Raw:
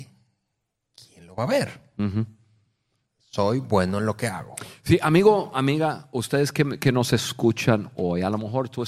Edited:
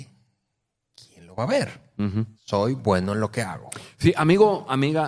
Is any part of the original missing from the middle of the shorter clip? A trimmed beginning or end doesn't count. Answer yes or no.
yes